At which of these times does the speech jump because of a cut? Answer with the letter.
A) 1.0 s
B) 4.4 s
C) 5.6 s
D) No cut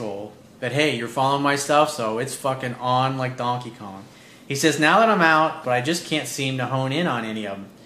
C